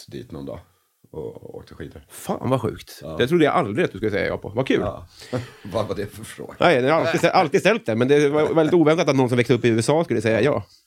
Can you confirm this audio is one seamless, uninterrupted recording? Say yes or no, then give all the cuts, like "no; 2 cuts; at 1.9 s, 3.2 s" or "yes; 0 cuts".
yes; 0 cuts